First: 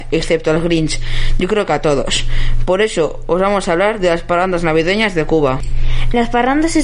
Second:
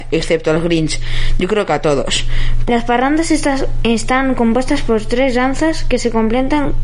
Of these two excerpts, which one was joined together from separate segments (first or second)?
second